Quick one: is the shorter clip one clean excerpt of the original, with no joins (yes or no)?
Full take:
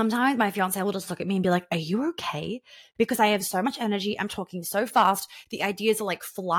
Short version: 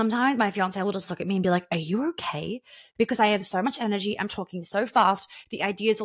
yes